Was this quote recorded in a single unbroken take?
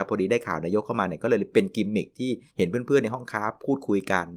no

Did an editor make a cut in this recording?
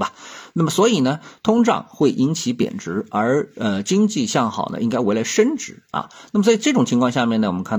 no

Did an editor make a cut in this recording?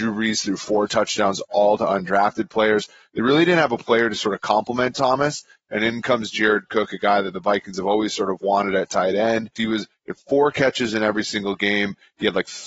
yes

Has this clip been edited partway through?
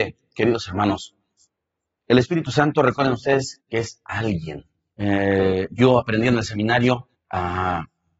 yes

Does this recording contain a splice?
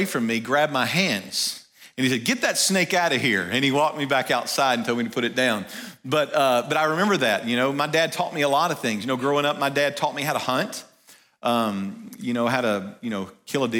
no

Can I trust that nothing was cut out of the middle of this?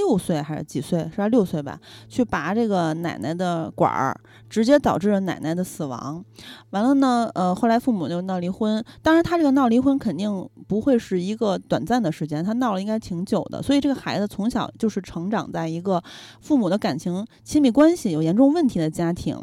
yes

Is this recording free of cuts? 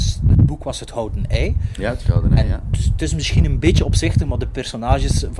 yes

